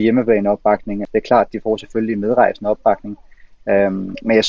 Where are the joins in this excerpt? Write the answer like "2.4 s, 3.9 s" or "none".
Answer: 1.1 s